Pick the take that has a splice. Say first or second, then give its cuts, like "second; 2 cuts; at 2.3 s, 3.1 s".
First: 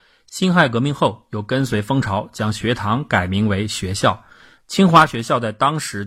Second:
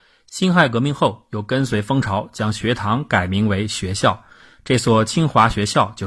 first; 1 cut; at 4.6 s